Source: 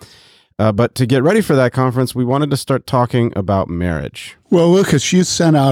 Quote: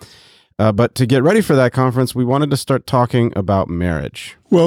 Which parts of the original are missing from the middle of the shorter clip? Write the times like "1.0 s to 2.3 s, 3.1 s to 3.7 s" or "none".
none